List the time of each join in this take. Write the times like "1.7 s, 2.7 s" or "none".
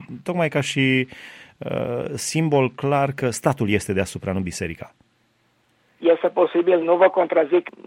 6.8 s